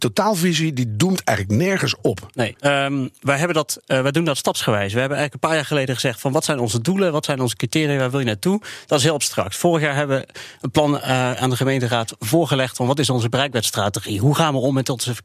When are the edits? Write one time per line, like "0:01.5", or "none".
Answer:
0:02.6
0:12.8